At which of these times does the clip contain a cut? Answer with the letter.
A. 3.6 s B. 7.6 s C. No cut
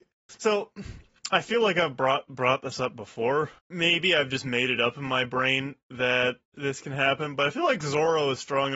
A